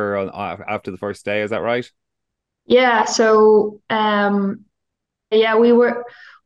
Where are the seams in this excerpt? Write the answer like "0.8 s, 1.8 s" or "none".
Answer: 5.3 s